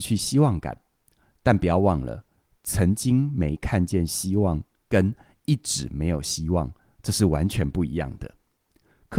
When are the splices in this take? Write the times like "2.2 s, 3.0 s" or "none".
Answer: none